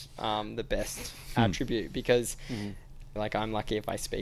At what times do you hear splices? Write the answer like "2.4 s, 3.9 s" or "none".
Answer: 3.2 s